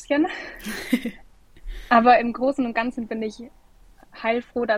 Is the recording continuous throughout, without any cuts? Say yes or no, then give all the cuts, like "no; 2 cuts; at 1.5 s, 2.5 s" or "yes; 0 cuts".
yes; 0 cuts